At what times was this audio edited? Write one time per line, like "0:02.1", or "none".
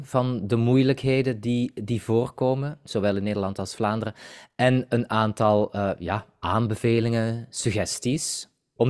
none